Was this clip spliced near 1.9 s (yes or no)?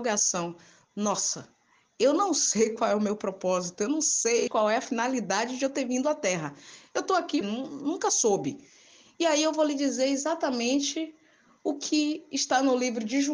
no